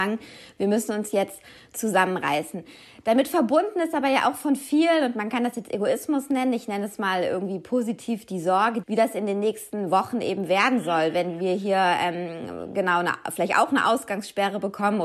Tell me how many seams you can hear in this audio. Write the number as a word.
one